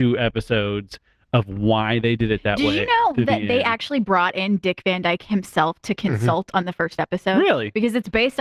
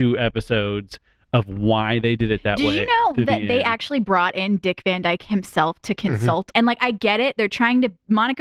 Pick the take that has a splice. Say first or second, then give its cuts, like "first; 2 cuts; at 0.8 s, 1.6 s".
second; 1 cut; at 6.5 s